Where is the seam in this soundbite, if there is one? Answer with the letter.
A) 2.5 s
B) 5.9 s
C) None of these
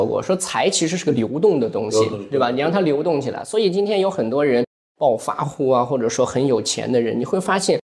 C